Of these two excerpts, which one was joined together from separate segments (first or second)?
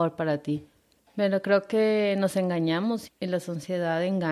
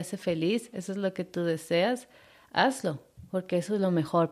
first